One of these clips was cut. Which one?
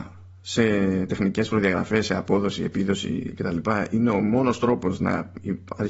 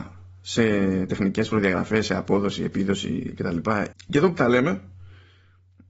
second; 1 cut; at 3.9 s

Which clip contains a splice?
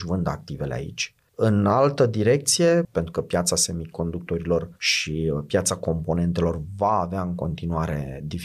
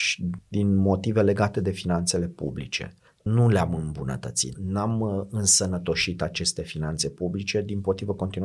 first; 2 cuts; at 1.3 s, 2.8 s

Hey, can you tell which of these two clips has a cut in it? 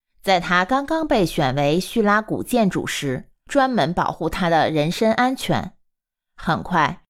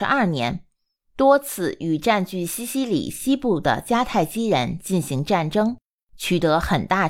first; 1 cut; at 3.5 s

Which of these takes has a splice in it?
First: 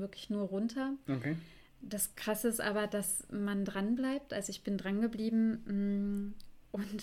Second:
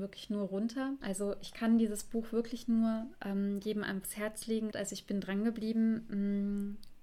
second; 2 cuts; at 1.0 s, 4.7 s

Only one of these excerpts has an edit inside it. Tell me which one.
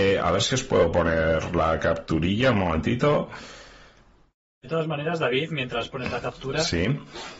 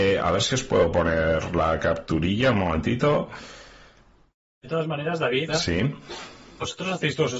second; 1 cut; at 5.5 s

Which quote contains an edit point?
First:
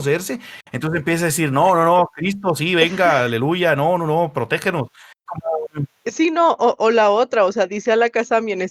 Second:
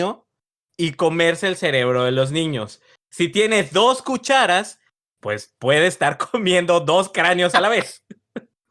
first; 2 cuts; at 5.3 s, 6.8 s

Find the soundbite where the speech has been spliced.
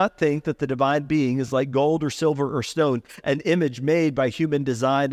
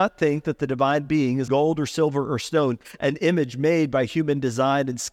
second; 1 cut; at 1.5 s

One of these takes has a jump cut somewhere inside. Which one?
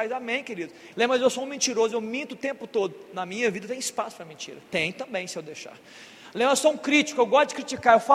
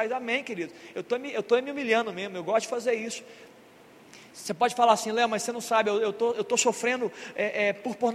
first; 1 cut; at 0.9 s

